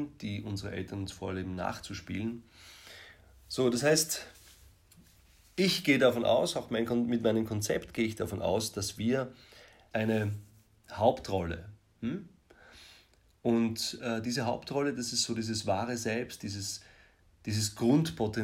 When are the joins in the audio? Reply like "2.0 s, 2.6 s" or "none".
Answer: 9.9 s